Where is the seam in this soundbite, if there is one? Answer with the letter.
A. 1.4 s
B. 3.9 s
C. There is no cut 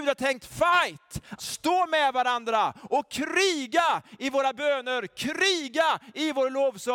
A